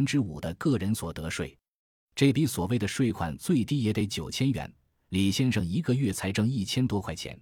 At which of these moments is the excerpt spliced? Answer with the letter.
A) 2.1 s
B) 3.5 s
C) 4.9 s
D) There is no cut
D